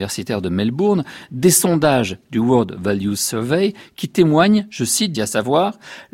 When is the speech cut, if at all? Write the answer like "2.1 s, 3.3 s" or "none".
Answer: 5.1 s